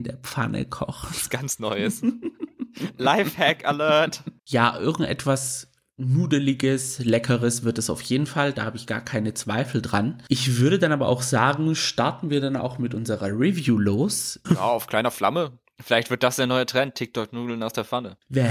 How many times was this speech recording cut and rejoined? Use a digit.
2